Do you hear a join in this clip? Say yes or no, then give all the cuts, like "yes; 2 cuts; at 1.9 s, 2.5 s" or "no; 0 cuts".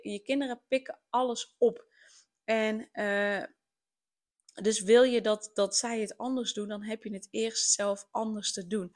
no; 0 cuts